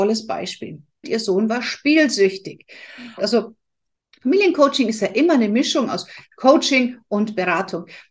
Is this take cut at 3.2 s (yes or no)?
yes